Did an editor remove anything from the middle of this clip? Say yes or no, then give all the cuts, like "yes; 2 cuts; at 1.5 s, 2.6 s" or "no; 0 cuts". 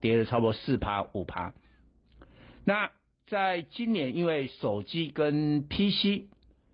no; 0 cuts